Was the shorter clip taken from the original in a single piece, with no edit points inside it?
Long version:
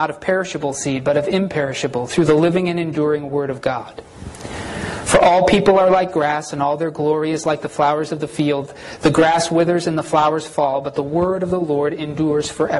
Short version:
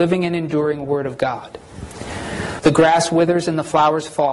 no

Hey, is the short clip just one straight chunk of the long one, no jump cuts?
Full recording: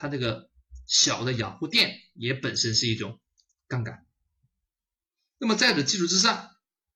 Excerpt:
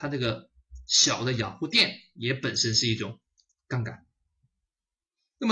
yes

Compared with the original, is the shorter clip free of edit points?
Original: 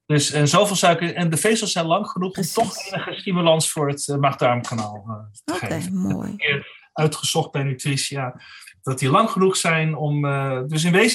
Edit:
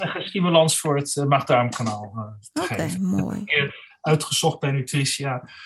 yes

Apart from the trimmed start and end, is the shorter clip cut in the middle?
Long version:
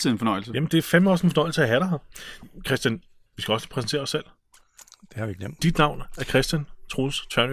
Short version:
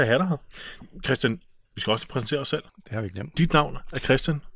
yes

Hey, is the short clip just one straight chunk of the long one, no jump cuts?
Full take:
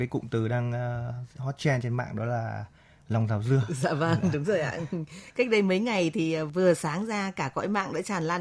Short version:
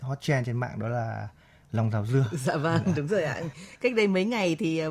no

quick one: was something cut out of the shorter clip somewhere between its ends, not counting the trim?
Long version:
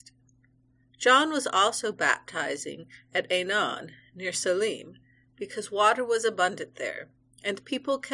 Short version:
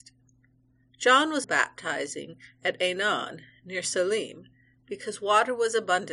yes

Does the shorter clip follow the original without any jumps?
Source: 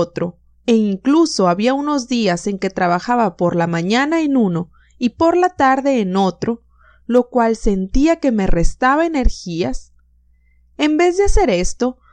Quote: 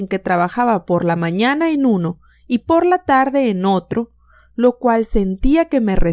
yes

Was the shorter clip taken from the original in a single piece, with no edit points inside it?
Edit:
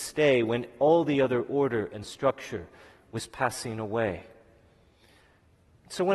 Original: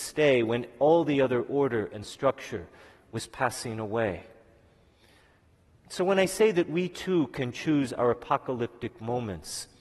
yes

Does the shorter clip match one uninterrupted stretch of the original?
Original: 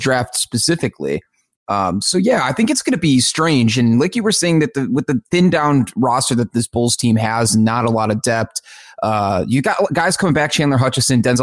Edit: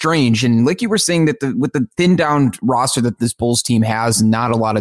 yes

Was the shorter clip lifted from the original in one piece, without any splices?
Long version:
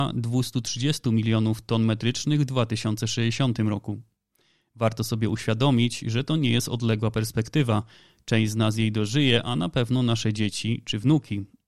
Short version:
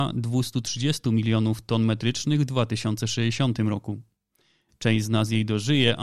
no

